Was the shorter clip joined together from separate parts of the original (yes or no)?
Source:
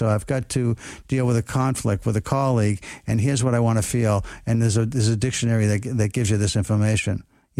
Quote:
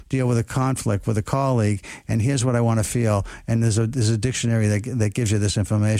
no